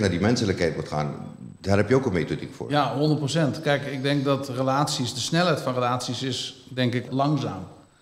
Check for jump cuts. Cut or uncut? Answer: cut